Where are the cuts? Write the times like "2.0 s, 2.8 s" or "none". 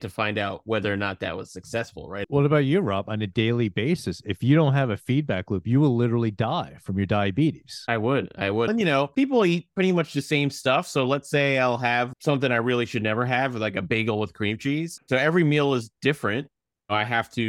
2.2 s, 8.7 s, 15.0 s